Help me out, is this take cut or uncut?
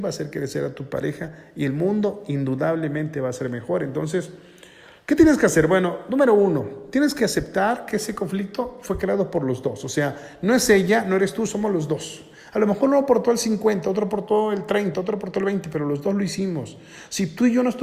cut